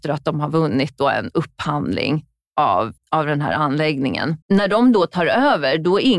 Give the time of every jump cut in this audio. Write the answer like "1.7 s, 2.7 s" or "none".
3.0 s, 4.4 s